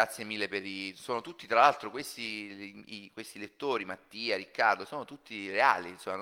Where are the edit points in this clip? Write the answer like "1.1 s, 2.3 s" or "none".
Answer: none